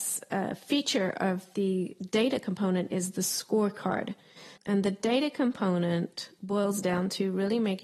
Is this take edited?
yes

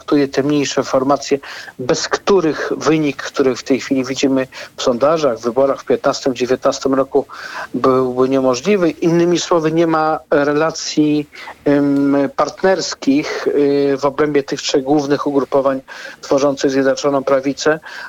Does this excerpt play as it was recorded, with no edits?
no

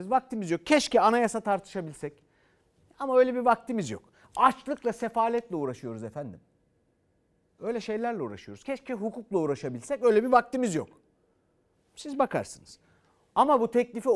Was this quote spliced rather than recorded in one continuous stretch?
no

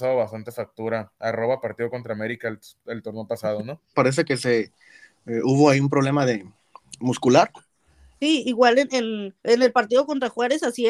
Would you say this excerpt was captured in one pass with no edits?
no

